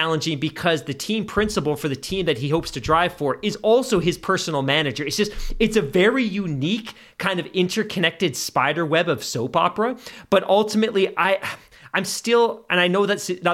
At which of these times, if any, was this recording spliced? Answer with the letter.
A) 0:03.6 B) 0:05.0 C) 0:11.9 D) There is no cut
D